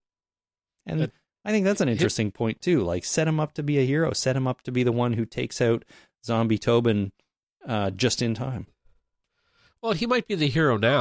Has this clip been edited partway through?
no; 0 cuts

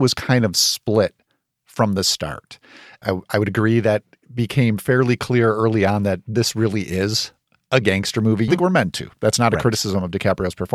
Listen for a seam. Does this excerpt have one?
yes; 2 cuts; at 3.0 s, 8.5 s

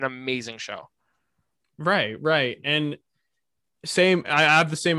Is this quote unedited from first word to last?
yes; 0 cuts

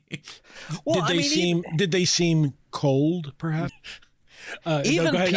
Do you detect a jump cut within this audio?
yes; 1 cut; at 3.7 s

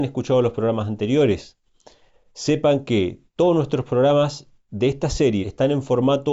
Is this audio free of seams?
no; 1 cut; at 5.4 s

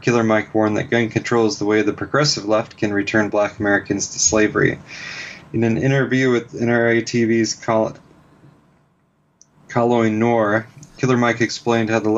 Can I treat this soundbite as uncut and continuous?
no; 1 cut; at 11.0 s

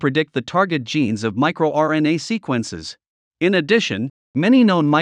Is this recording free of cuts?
no; 1 cut; at 3.2 s

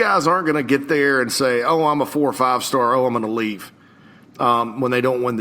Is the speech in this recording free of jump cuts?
yes; 0 cuts

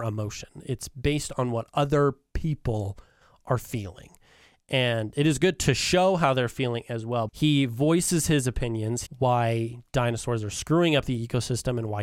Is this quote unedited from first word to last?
no; 2 cuts; at 7.3 s, 9.1 s

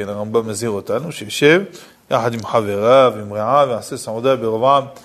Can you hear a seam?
no; 0 cuts

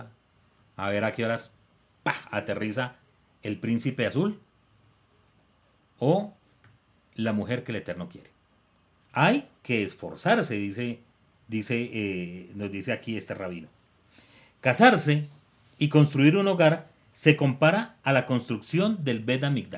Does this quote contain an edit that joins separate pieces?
no; 0 cuts

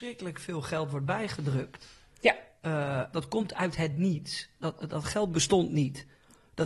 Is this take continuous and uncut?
no; 1 cut; at 3.1 s

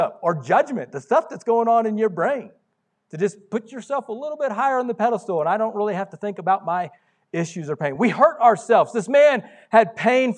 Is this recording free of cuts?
yes; 0 cuts

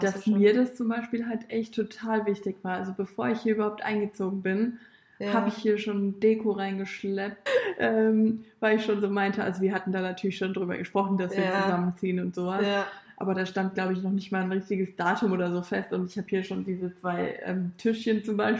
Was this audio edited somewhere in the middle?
yes; 1 cut; at 7.5 s

